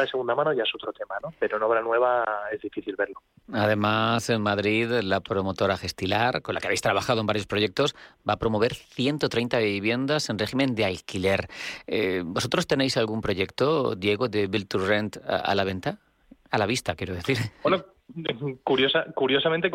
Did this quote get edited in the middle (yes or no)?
no